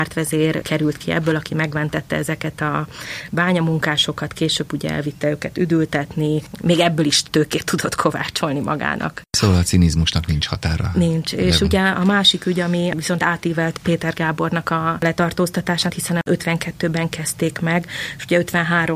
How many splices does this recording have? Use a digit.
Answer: 1